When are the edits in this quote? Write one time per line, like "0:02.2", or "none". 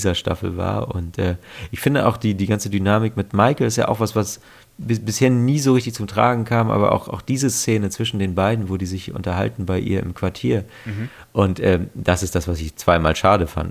none